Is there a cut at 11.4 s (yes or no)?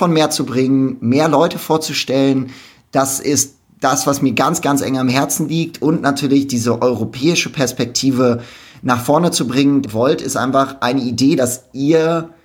yes